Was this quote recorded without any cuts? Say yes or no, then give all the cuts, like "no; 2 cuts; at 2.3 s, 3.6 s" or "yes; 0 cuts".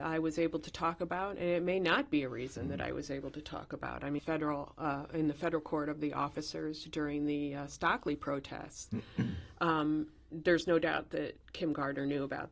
no; 1 cut; at 4.2 s